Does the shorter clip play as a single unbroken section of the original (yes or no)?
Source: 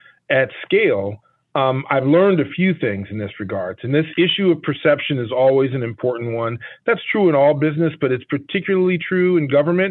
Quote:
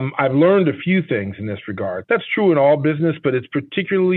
no